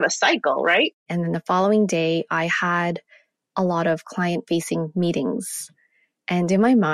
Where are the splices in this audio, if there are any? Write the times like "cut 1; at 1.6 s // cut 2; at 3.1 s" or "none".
cut 1; at 1.1 s